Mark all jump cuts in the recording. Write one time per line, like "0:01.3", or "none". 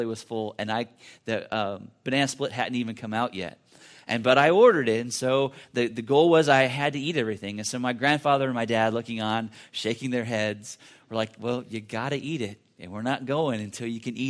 none